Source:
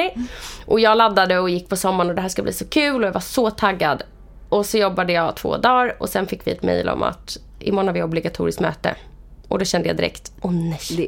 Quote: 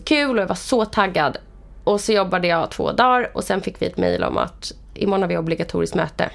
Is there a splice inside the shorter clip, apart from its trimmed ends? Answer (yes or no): no